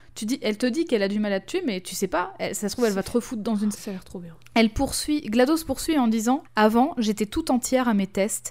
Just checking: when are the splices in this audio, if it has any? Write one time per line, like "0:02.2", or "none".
0:03.7
0:06.4